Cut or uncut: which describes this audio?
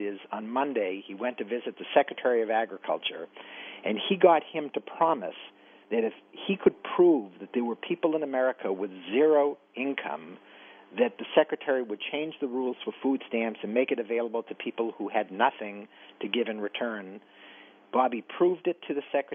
uncut